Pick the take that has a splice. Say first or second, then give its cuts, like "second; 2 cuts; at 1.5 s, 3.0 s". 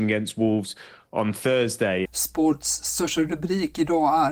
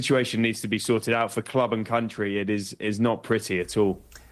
first; 1 cut; at 2.0 s